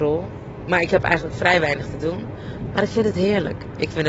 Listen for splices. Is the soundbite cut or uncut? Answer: cut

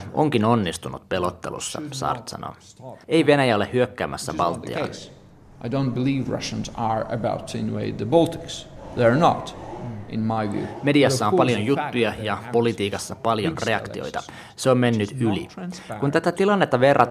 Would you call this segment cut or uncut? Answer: cut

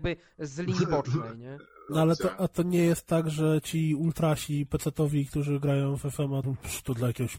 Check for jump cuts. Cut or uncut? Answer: cut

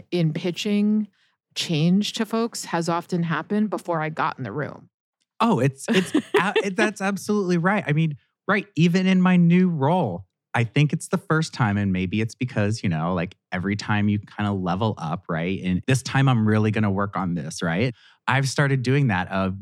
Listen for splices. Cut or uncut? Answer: cut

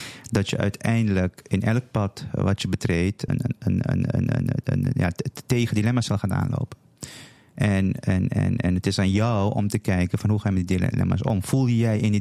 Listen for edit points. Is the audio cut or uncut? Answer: cut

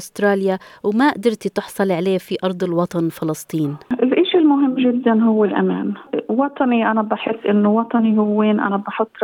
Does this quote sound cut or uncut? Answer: uncut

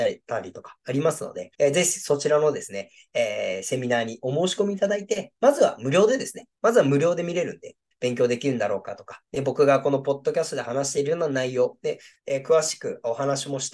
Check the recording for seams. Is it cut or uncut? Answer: cut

